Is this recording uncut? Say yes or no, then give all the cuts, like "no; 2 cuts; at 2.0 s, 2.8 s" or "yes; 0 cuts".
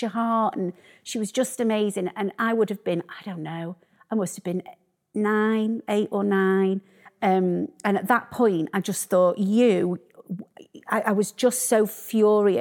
no; 1 cut; at 7.1 s